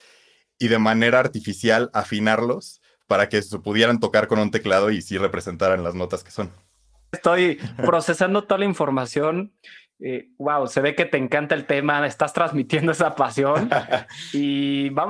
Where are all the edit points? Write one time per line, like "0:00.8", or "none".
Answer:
0:07.1